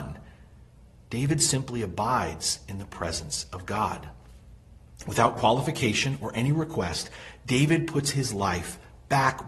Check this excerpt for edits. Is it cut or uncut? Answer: uncut